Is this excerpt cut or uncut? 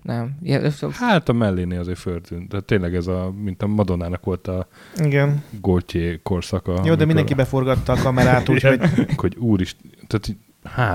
cut